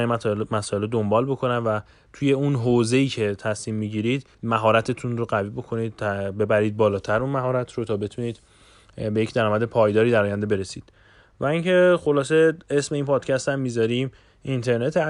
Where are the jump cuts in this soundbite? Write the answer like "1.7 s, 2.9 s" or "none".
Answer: 4.3 s